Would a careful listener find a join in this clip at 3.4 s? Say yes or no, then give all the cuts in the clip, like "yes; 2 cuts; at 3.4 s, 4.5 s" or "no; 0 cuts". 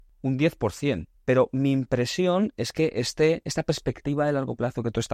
no; 1 cut; at 1.1 s